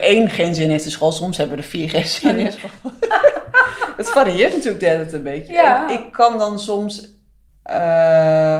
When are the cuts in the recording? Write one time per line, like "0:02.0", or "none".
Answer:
0:07.5